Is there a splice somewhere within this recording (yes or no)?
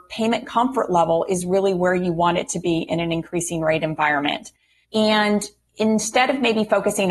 yes